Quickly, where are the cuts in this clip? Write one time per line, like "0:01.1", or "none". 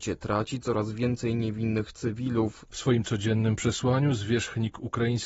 0:02.7